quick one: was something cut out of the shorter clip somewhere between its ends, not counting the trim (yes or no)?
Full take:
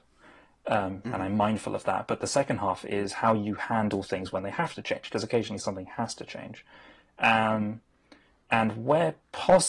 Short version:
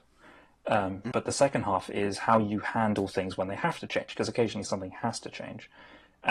yes